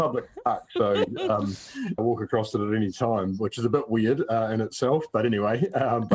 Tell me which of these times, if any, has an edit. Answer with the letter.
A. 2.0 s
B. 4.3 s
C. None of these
A